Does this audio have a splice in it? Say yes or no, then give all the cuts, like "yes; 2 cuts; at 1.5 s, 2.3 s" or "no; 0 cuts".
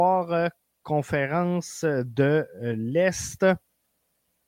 no; 0 cuts